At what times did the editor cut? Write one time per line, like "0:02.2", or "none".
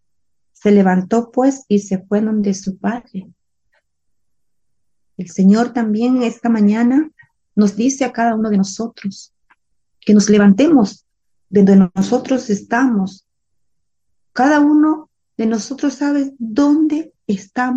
none